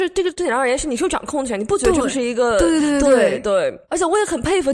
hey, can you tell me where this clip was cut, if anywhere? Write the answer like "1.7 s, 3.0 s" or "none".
none